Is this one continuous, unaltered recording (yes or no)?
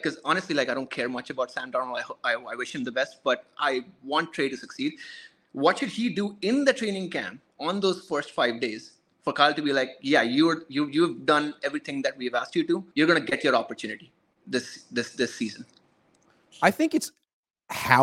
no